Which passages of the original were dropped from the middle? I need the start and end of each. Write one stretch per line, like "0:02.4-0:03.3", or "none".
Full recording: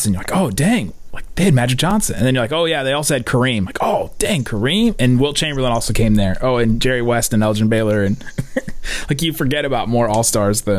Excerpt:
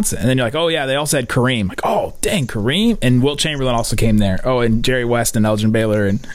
none